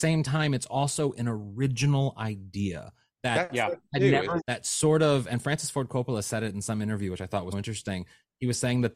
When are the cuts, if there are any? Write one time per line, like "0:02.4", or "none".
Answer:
0:04.4
0:07.5